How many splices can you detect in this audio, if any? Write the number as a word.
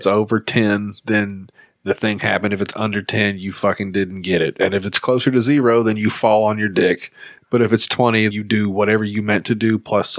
one